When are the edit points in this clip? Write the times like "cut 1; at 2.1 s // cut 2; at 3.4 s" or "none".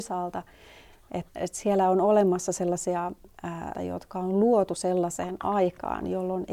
cut 1; at 1.3 s // cut 2; at 3.7 s